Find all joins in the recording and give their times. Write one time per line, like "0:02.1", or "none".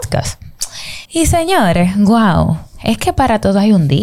0:01.1